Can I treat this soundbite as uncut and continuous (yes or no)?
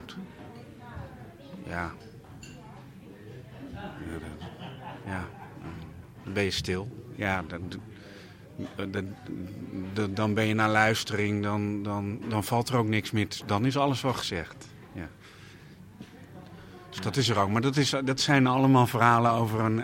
no